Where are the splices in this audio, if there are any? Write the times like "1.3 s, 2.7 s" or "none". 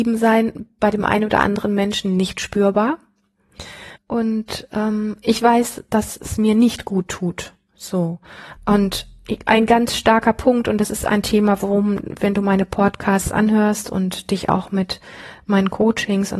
4.0 s, 8.6 s